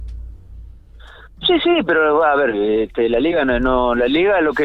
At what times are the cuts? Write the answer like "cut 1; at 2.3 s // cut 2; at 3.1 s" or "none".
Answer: none